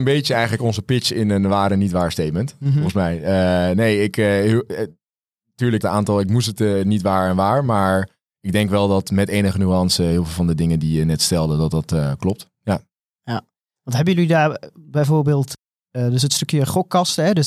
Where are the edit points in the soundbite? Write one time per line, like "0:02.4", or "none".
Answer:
0:05.8